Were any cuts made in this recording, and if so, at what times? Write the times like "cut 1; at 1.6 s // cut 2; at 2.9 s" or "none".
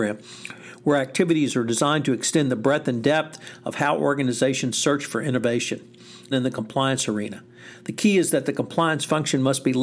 cut 1; at 6.3 s